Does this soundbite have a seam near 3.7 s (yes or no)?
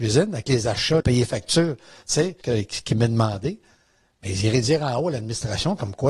no